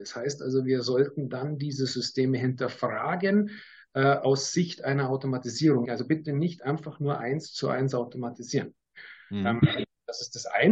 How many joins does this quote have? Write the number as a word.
one